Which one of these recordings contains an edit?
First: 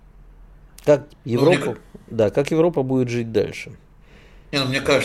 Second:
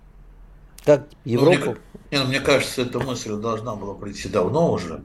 second; 1 cut; at 2.0 s

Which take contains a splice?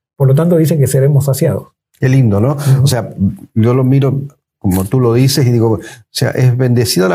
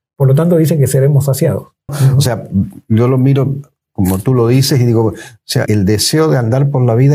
second; 2 cuts; at 1.9 s, 5.7 s

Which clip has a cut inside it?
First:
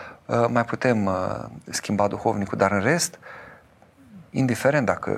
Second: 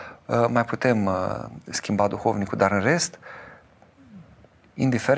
first; 1 cut; at 4.3 s

